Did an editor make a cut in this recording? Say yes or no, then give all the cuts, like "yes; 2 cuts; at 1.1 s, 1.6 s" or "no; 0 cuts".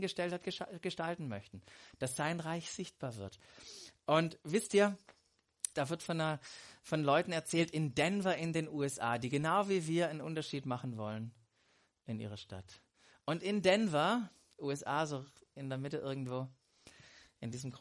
yes; 1 cut; at 5.7 s